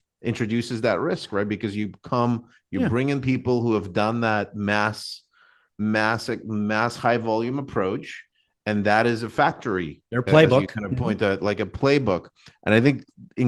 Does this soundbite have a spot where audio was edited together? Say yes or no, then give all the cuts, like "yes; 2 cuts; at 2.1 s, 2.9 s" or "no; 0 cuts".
no; 0 cuts